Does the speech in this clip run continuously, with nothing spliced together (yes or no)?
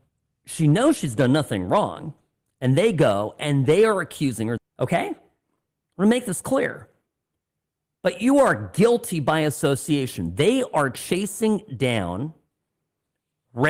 no